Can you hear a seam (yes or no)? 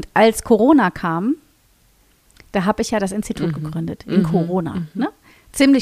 no